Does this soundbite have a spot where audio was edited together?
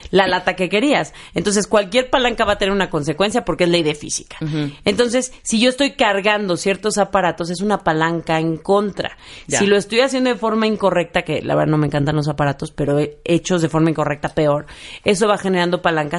no; 0 cuts

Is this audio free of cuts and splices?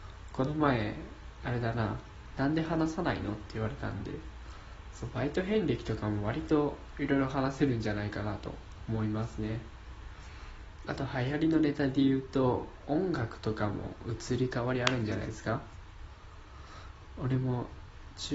no; 1 cut; at 2.3 s

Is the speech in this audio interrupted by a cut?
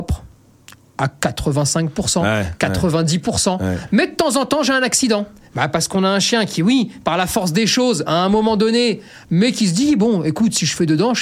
yes; 1 cut; at 9.2 s

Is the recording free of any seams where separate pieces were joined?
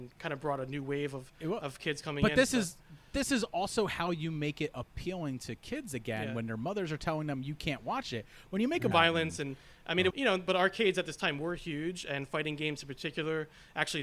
no; 2 cuts; at 8.9 s, 10.1 s

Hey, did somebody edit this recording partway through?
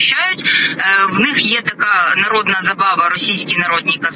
no; 0 cuts

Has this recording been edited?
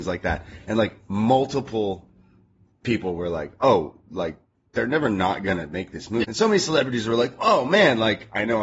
yes; 1 cut; at 6.2 s

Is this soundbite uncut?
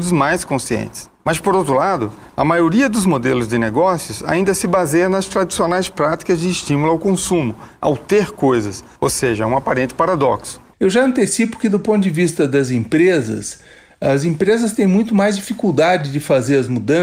no; 1 cut; at 10.7 s

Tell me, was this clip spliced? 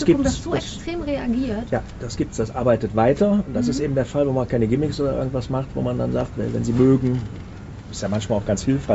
no; 0 cuts

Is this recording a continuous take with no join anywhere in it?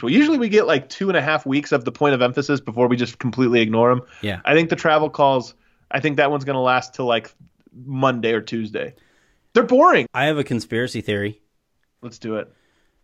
no; 1 cut; at 10.1 s

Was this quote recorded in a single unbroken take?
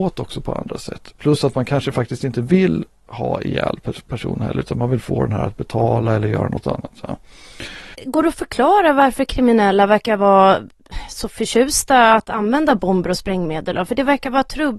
no; 1 cut; at 7.9 s

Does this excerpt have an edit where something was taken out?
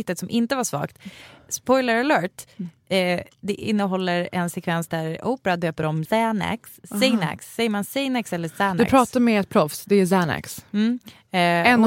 yes; 1 cut; at 6.1 s

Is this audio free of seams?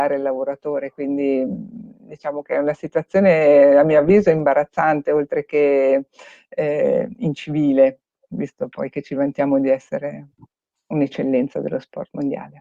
yes; 0 cuts

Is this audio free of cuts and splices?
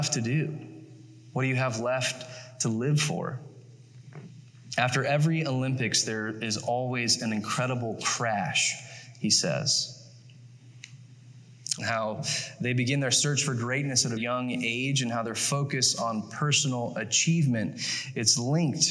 no; 2 cuts; at 11.8 s, 14.2 s

